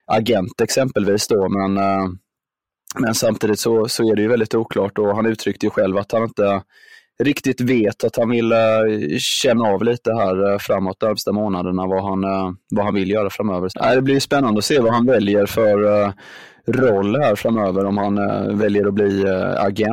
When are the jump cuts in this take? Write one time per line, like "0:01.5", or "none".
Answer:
0:13.7